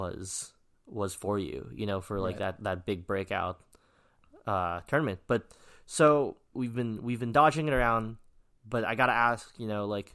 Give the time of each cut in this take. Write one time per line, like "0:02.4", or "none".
0:06.5